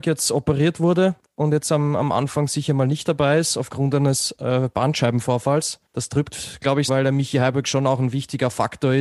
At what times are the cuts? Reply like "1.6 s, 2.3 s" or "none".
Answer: 5.9 s, 6.9 s